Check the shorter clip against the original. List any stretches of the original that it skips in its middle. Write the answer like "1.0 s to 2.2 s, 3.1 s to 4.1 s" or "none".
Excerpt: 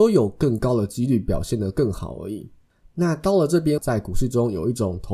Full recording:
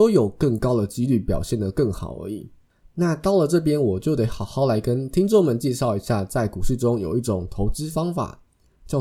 3.8 s to 6.3 s